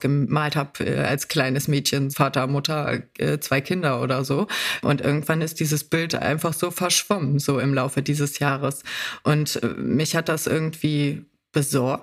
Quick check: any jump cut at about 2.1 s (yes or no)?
yes